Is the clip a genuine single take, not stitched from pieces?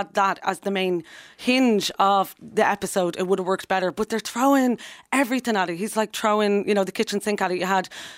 yes; 0 cuts

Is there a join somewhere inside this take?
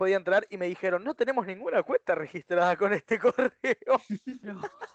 no; 0 cuts

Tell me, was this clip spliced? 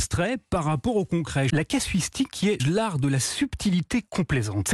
yes; 2 cuts; at 1.5 s, 2.6 s

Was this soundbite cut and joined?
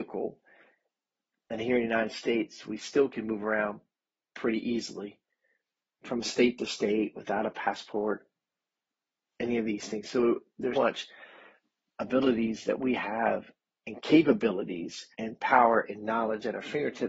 yes; 3 cuts; at 6.0 s, 10.7 s, 15.1 s

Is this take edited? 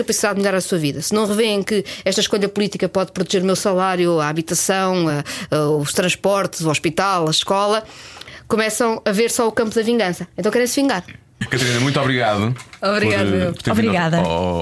no; 0 cuts

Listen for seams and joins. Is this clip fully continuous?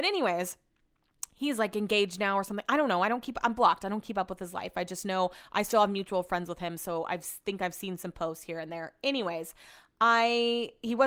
yes; 0 cuts

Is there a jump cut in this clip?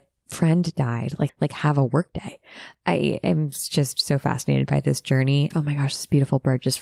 yes; 3 cuts; at 1.3 s, 2.7 s, 5.5 s

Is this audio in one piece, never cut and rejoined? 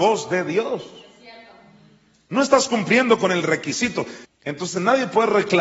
no; 1 cut; at 4.2 s

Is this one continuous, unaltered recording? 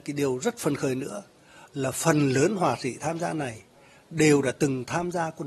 yes; 0 cuts

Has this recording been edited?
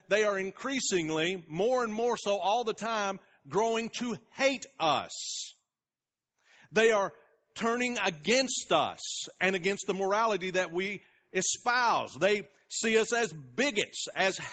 no; 0 cuts

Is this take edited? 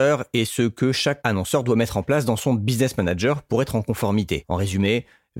no; 0 cuts

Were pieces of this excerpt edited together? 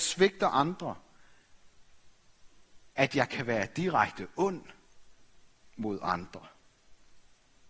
no; 0 cuts

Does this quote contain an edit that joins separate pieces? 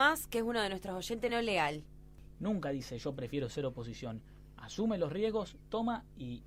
yes; 2 cuts; at 1.3 s, 2.4 s

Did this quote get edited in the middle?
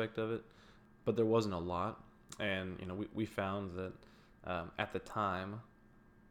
no; 0 cuts

